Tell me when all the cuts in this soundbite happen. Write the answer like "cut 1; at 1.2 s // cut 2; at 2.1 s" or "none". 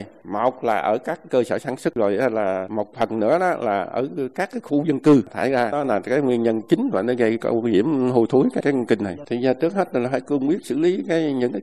cut 1; at 8.6 s